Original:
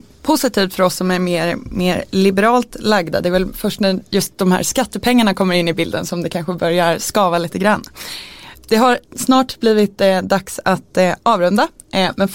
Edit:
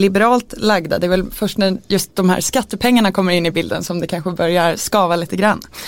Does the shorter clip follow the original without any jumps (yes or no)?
yes